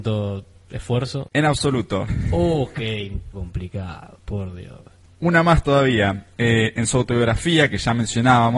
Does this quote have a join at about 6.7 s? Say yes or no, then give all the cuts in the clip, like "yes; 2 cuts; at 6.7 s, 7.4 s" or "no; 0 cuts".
no; 2 cuts; at 2.1 s, 3.3 s